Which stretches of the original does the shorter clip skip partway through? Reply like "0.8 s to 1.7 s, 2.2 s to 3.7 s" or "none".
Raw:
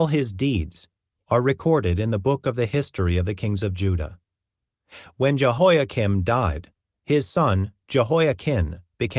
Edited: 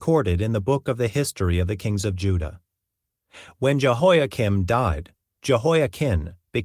7.0 s to 7.8 s